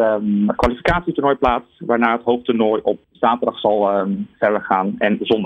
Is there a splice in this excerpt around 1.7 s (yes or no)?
no